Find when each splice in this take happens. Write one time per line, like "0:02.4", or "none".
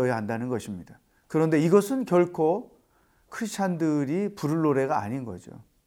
0:01.1